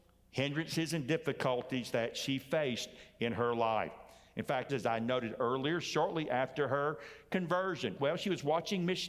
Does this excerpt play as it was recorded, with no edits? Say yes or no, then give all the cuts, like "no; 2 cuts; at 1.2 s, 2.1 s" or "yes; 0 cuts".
no; 2 cuts; at 4.7 s, 8.0 s